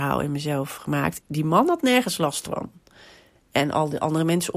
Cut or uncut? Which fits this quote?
cut